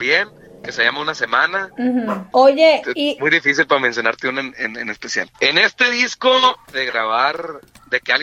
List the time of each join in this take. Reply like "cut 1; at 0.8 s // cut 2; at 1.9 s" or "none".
cut 1; at 2.3 s // cut 2; at 5.3 s // cut 3; at 6.7 s

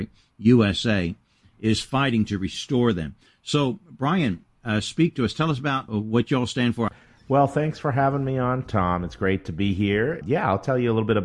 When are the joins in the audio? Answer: none

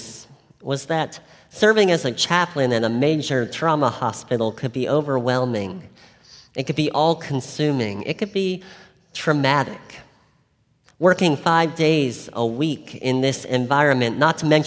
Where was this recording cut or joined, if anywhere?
none

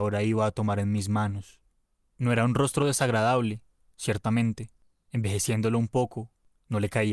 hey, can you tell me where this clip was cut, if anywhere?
cut 1; at 5.1 s

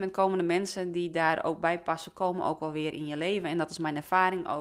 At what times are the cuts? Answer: none

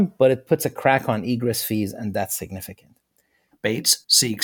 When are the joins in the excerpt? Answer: cut 1; at 3.5 s

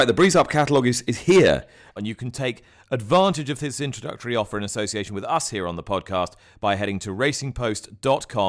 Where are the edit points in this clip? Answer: cut 1; at 2.0 s

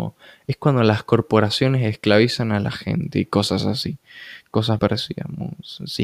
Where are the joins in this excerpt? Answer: cut 1; at 4.8 s

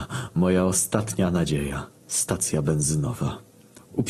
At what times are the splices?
cut 1; at 2.0 s

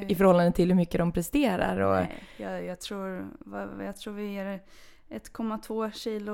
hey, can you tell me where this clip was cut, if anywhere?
none

